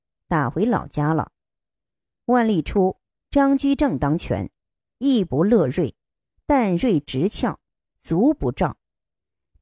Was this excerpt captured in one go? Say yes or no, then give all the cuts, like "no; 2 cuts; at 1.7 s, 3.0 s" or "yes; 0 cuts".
yes; 0 cuts